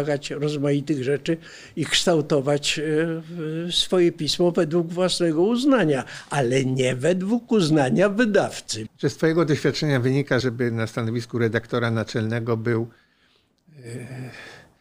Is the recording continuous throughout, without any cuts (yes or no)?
no